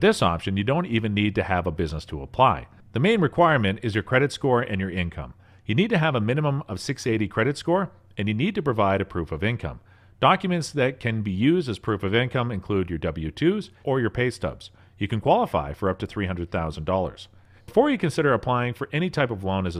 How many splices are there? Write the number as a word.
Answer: two